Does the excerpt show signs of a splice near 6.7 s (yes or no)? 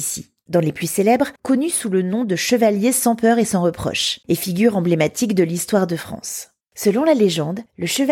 no